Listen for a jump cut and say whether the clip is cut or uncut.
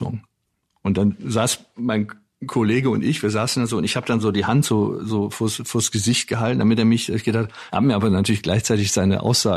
cut